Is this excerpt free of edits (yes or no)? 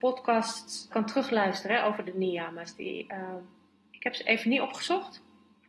no